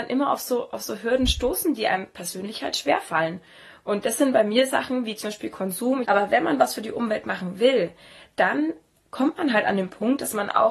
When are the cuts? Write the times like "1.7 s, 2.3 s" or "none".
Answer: 6.0 s